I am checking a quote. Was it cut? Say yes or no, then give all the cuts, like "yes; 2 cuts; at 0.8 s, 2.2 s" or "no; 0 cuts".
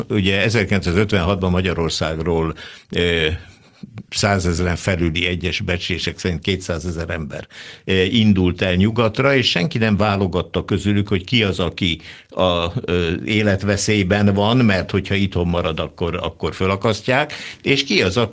no; 0 cuts